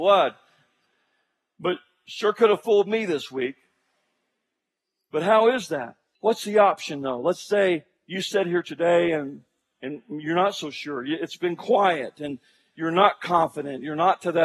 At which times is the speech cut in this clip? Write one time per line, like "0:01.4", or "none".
0:06.2